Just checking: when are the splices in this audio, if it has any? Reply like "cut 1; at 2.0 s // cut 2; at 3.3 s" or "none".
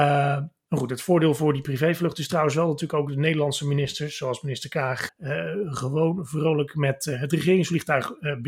cut 1; at 5.1 s